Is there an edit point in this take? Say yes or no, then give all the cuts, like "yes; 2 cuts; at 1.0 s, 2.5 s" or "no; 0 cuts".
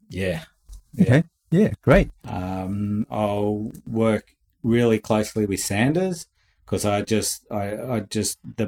yes; 1 cut; at 2.2 s